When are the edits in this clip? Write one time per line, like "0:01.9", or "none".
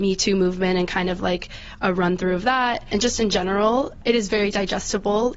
none